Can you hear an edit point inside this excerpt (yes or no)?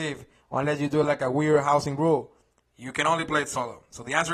no